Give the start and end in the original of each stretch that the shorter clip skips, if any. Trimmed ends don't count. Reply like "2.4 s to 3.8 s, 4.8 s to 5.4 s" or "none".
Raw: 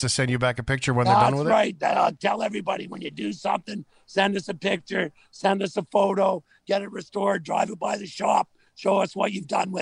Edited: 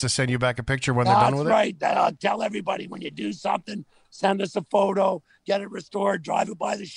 4.0 s to 5.3 s